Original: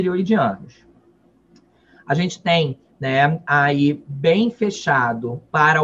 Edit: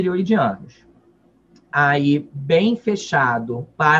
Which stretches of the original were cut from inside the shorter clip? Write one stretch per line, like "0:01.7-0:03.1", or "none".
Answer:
0:01.7-0:03.4